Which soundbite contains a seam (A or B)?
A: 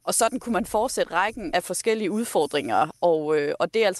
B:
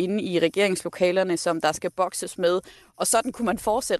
A